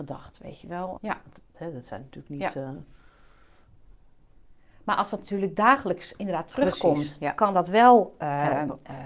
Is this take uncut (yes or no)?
no